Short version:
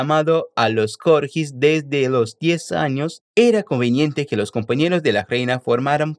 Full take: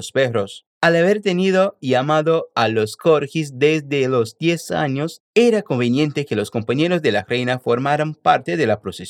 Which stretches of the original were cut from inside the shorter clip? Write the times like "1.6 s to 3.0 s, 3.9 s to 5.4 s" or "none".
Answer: none